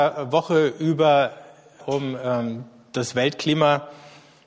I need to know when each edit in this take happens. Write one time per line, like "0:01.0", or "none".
0:01.8